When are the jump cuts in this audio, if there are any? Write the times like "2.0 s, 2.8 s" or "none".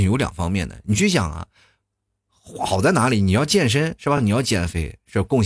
none